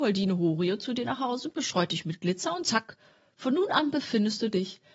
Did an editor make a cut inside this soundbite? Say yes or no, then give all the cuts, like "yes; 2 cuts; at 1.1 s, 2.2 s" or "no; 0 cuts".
no; 0 cuts